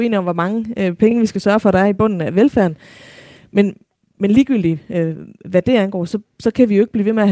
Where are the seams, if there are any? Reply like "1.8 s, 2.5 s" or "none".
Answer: none